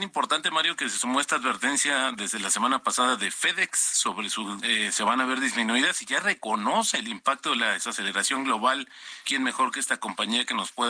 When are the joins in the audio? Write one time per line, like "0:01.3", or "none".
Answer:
0:04.6
0:09.2